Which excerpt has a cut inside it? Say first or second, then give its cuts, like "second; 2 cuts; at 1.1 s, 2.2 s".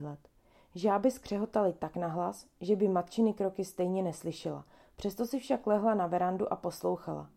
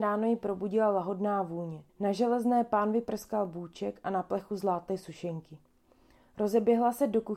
second; 1 cut; at 1.9 s